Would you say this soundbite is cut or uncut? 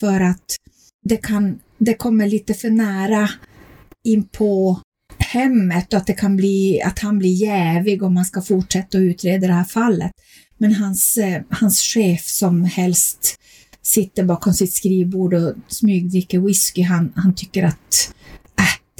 uncut